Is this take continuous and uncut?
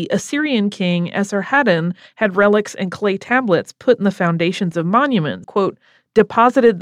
no; 1 cut; at 5.4 s

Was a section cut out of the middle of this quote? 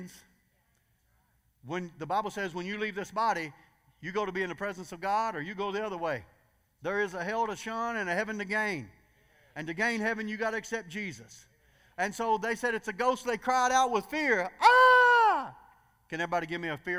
no; 0 cuts

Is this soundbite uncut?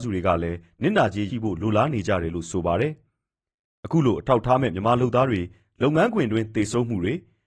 no; 1 cut; at 1.3 s

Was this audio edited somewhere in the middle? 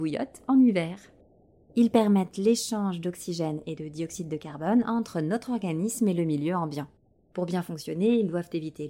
yes; 1 cut; at 1.7 s

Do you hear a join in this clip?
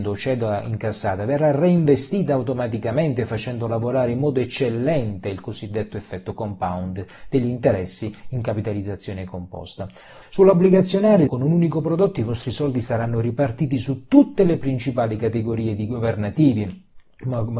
yes; 2 cuts; at 10.2 s, 11.3 s

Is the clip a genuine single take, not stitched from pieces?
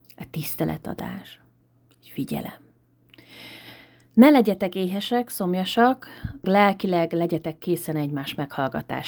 no; 1 cut; at 6.4 s

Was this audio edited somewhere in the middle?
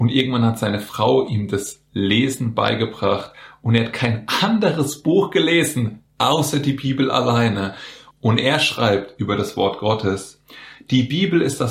yes; 2 cuts; at 6.1 s, 8.1 s

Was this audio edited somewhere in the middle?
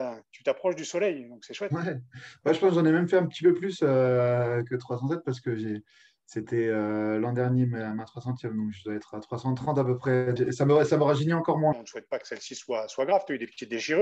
yes; 2 cuts; at 10.4 s, 11.7 s

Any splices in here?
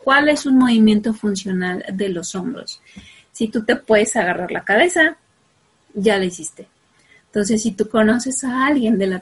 no; 0 cuts

